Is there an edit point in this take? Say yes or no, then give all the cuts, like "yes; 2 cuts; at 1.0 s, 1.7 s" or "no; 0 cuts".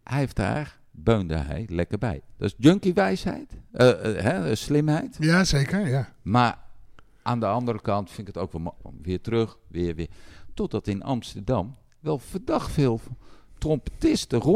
yes; 1 cut; at 8.8 s